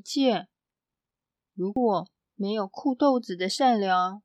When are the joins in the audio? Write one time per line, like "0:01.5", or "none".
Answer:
none